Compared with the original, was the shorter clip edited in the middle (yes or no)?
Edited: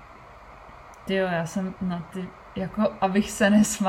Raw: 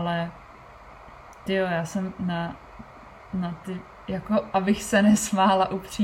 yes